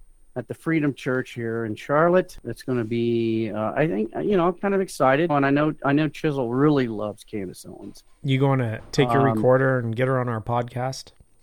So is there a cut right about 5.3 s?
yes; 1 cut; at 5.3 s

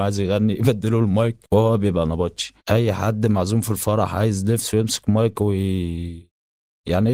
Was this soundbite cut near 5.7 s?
no; 2 cuts; at 1.4 s, 2.6 s

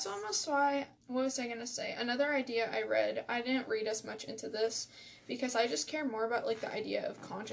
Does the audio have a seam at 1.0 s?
yes; 1 cut; at 1.0 s

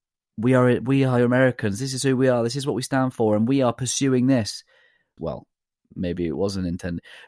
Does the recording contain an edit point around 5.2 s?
yes; 1 cut; at 5.2 s

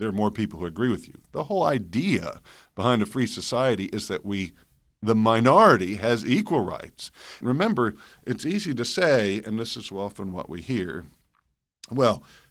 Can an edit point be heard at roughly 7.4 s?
yes; 1 cut; at 7.4 s

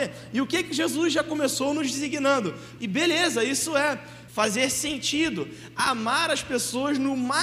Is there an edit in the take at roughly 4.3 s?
yes; 2 cuts; at 2.8 s, 4.3 s

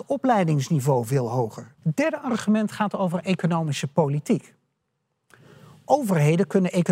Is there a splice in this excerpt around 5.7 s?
no; 1 cut; at 1.8 s

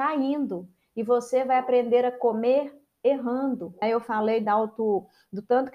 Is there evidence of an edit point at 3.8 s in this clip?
yes; 1 cut; at 3.8 s

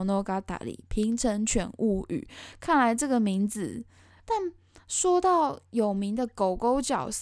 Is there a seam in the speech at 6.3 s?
no; 1 cut; at 4.2 s

